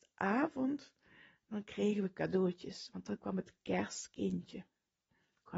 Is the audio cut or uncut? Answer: uncut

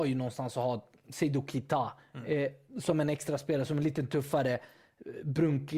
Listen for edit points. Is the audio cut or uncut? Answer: uncut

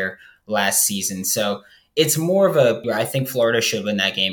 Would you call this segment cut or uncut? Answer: cut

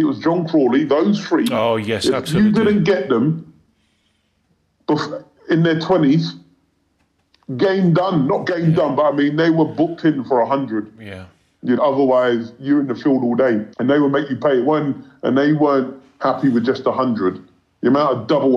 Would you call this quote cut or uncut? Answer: cut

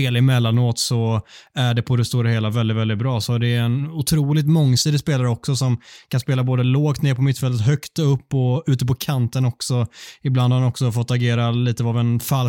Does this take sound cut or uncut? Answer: uncut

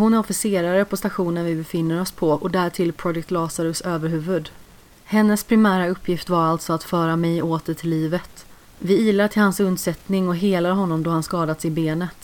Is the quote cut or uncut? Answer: cut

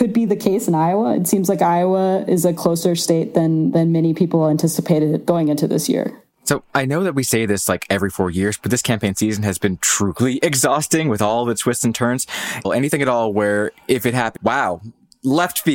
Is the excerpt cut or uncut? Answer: cut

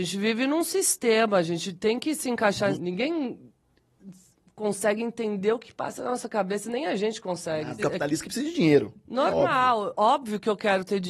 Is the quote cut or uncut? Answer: cut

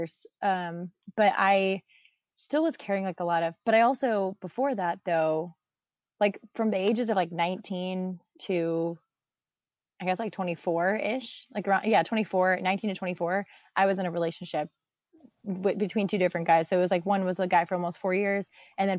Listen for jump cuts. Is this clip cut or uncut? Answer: uncut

